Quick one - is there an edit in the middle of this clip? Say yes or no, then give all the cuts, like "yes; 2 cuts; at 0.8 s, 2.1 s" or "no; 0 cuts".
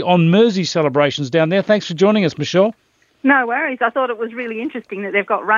no; 0 cuts